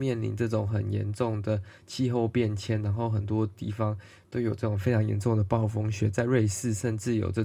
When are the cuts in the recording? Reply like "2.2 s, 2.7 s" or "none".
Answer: none